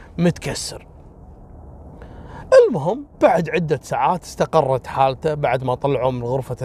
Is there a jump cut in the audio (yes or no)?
yes